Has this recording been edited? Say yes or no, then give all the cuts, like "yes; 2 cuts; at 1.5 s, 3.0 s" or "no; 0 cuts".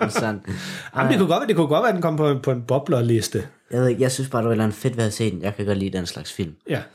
no; 0 cuts